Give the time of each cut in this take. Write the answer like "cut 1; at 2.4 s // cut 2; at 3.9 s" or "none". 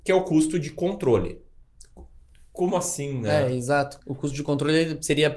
cut 1; at 4.0 s